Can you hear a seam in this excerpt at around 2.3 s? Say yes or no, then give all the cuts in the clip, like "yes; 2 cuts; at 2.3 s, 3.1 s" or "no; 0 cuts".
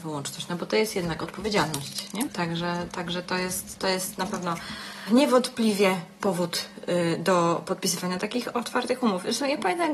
yes; 1 cut; at 2.3 s